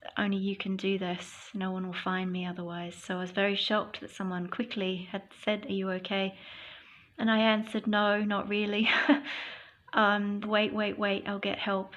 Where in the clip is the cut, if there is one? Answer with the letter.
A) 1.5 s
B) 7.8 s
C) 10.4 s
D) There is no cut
C